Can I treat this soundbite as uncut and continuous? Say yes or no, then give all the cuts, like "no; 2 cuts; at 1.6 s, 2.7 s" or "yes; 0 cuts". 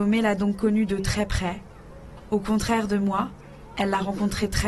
yes; 0 cuts